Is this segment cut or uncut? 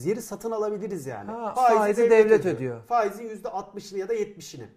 cut